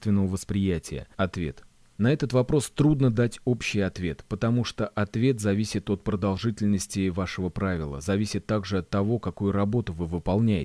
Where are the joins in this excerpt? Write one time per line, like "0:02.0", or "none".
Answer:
0:01.1